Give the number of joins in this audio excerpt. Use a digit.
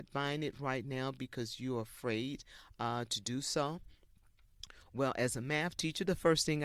0